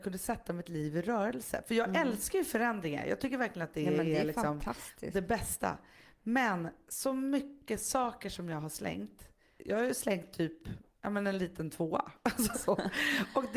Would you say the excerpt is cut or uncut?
cut